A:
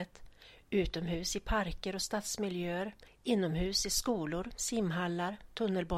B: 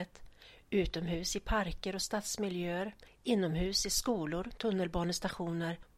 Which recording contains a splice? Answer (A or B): B